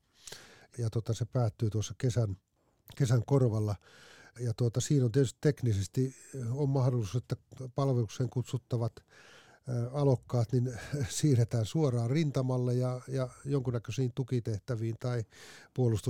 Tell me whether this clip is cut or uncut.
uncut